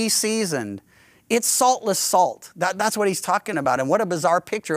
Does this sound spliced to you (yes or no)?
no